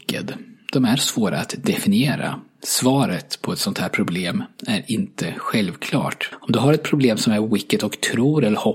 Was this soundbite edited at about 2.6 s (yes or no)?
no